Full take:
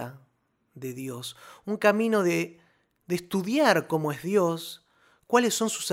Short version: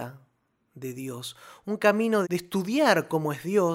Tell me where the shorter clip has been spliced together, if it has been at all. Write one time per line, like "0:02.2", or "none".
0:02.2